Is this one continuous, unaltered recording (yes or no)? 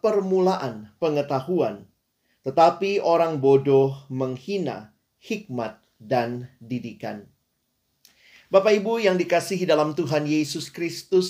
yes